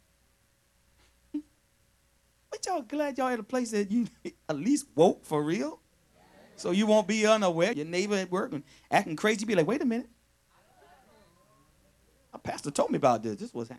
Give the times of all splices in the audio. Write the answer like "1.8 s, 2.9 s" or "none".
7.7 s